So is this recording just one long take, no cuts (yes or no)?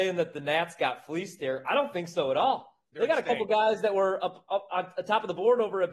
yes